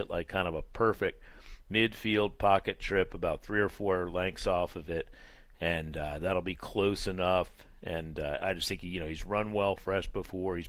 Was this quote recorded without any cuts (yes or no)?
yes